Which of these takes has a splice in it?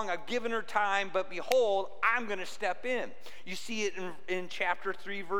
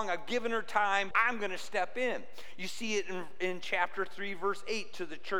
second; 1 cut; at 1.1 s

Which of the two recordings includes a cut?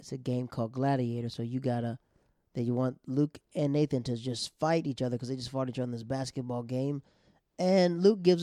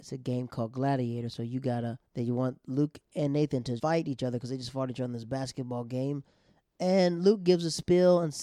second; 2 cuts; at 2.1 s, 3.8 s

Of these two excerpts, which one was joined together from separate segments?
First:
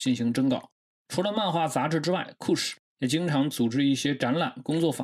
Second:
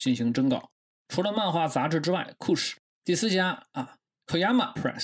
second; 1 cut; at 2.9 s

